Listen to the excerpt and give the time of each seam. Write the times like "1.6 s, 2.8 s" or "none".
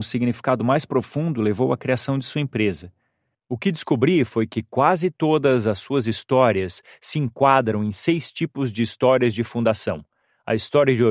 none